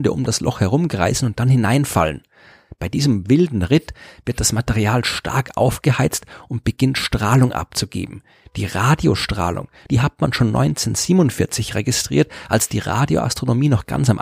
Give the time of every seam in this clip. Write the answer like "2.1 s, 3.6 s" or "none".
9.9 s